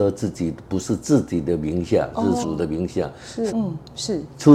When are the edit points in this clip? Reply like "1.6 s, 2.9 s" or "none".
2.4 s, 3.5 s